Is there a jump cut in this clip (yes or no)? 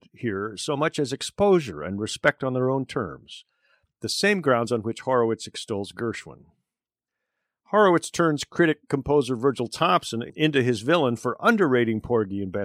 no